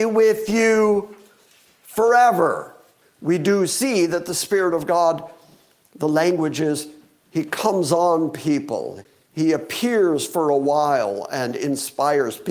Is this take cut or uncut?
cut